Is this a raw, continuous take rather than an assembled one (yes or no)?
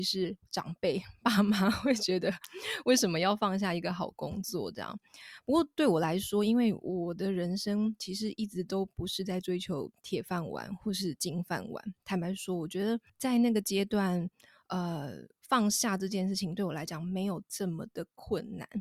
no